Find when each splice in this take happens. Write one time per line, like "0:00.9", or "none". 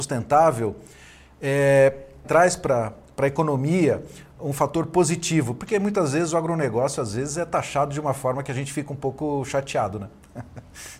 0:02.2